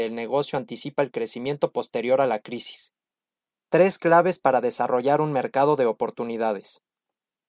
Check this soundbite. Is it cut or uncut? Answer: uncut